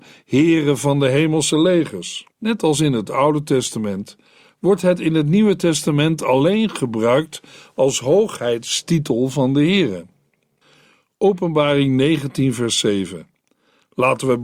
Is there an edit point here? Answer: yes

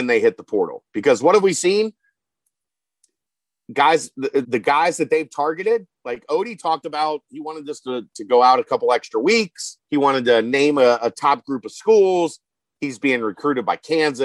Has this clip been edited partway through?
yes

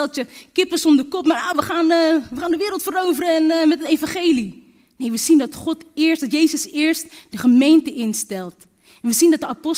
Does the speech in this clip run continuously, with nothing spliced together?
yes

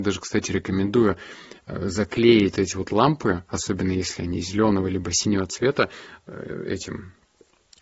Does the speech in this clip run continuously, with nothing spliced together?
no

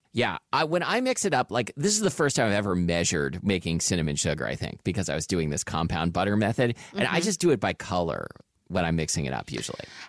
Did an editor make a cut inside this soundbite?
no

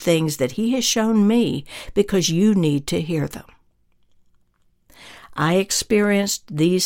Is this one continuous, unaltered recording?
yes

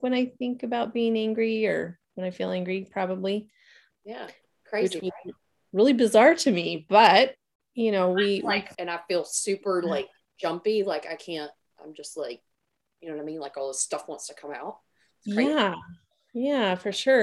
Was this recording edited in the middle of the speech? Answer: yes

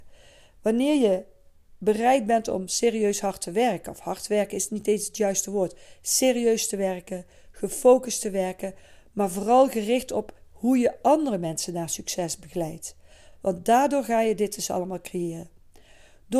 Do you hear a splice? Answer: no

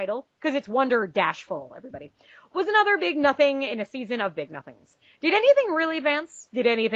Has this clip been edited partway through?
no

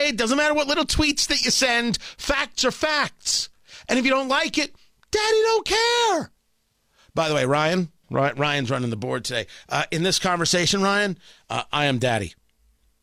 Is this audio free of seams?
yes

